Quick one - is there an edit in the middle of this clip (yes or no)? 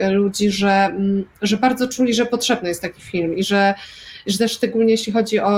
no